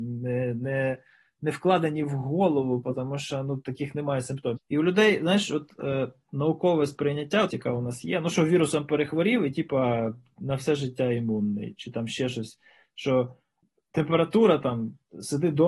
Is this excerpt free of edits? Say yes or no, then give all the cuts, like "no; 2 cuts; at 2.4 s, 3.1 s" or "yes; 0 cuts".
no; 2 cuts; at 4.6 s, 7.5 s